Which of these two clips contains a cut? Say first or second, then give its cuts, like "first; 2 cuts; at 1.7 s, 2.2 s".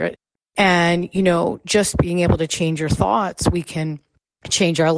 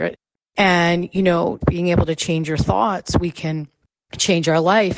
second; 1 cut; at 1.6 s